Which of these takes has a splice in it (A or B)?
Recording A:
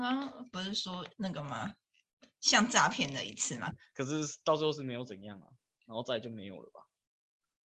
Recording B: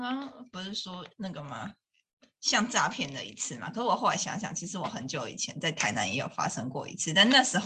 A